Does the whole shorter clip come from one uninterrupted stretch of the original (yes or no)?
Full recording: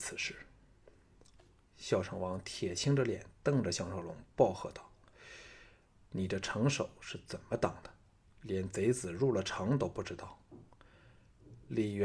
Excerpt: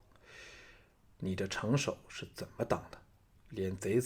yes